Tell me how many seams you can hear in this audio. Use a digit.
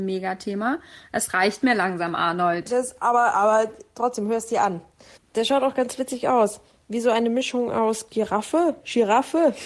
1